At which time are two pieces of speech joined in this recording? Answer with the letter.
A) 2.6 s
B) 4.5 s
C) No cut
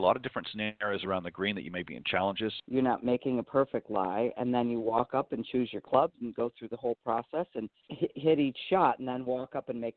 A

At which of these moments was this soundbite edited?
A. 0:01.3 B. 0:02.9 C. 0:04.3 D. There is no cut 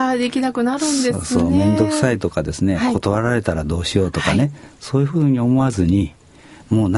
D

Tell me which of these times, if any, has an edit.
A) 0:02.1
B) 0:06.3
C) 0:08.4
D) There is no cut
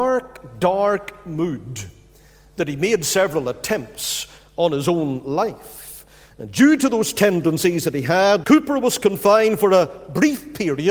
C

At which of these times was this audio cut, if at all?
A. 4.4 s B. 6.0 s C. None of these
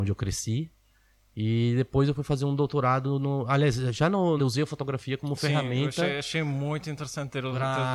A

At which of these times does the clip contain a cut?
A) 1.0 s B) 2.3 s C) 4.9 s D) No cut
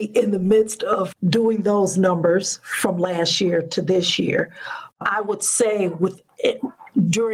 C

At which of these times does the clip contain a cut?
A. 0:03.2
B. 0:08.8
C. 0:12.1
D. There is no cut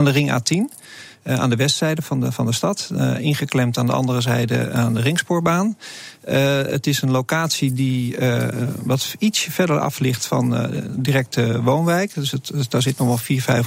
D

